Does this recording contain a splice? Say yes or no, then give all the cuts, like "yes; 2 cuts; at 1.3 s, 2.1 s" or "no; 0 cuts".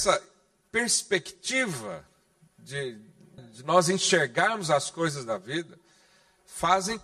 yes; 1 cut; at 3.4 s